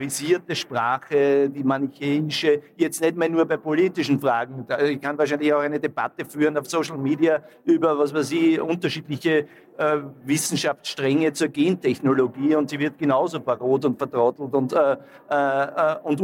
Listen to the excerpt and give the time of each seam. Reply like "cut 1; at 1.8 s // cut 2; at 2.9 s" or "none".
none